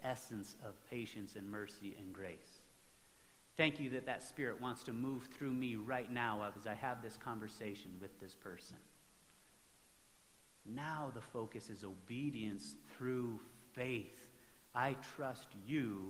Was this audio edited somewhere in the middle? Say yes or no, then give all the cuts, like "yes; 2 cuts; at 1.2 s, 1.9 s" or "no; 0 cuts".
no; 0 cuts